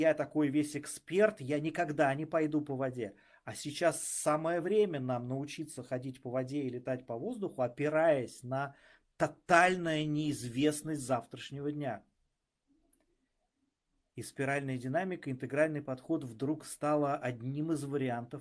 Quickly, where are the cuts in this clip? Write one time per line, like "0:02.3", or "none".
0:14.1